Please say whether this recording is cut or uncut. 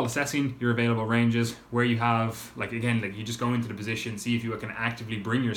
uncut